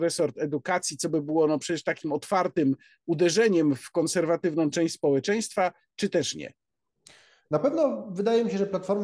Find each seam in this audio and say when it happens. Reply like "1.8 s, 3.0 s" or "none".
none